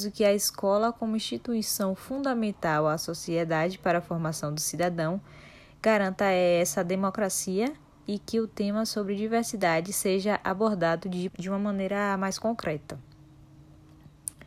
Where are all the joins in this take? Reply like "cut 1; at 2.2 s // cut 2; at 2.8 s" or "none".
cut 1; at 11.3 s